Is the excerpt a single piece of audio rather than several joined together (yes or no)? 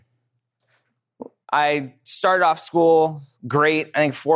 no